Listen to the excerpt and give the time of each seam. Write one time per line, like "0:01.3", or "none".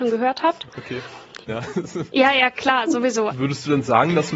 0:01.5
0:03.3